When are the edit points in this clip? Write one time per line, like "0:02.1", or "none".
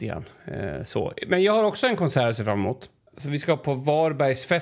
0:03.1